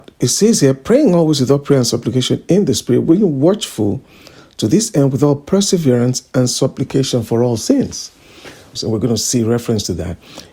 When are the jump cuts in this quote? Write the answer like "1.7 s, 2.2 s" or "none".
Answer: 8.8 s